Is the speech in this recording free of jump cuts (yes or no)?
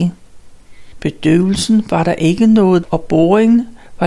no